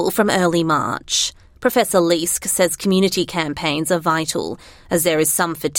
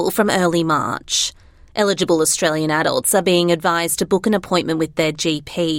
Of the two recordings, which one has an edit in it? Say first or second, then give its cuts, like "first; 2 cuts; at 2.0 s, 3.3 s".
first; 1 cut; at 1.5 s